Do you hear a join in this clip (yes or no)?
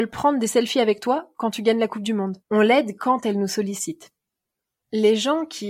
yes